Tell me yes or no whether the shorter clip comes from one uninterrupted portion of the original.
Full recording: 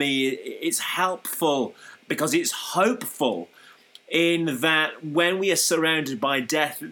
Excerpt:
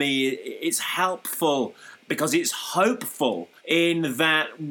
no